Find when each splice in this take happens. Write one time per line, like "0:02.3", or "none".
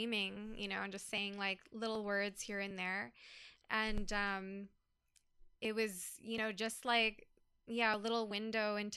0:03.6
0:05.6